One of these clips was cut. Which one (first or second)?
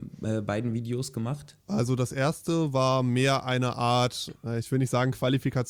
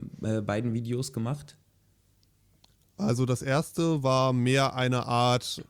first